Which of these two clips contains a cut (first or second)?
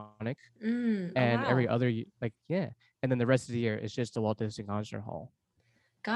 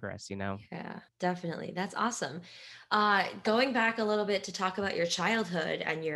second